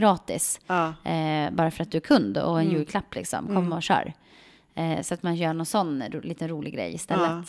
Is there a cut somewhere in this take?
no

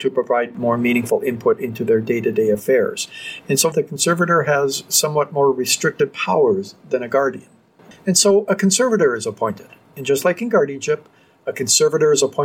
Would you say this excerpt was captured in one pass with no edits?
no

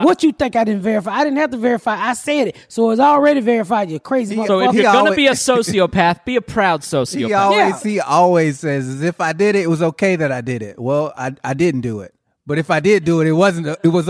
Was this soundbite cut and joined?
no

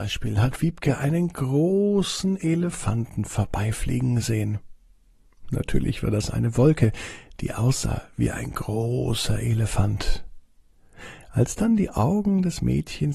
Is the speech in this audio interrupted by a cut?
no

